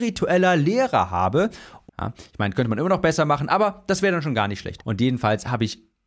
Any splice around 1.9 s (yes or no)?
yes